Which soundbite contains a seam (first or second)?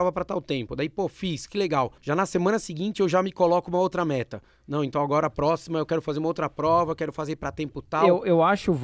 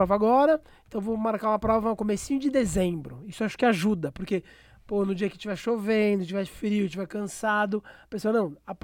first